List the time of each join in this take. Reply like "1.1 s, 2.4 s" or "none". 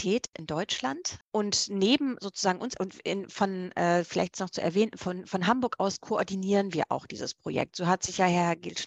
1.2 s

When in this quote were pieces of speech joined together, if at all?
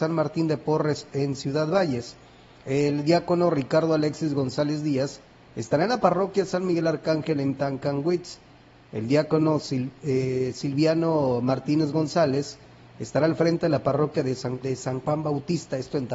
2.6 s, 14.6 s

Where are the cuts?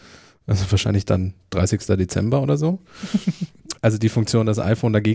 3.7 s

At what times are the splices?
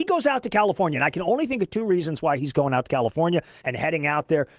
3.6 s

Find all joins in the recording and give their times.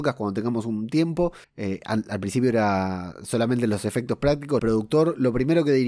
1.4 s, 4.6 s

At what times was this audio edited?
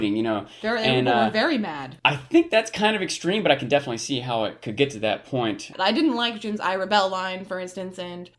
5.7 s

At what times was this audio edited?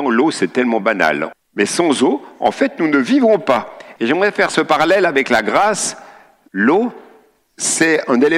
1.3 s, 4.0 s, 6.5 s

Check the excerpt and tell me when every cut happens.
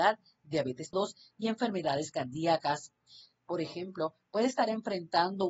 0.9 s, 3.3 s

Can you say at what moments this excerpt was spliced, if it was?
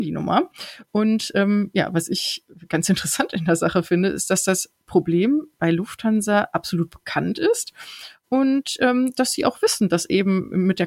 none

